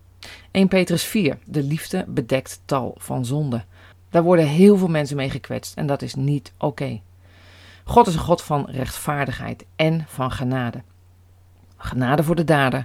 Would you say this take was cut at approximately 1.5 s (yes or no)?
yes